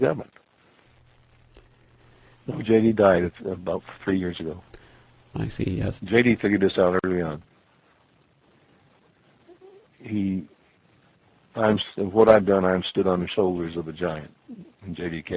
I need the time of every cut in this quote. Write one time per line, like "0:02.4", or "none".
0:02.3
0:06.0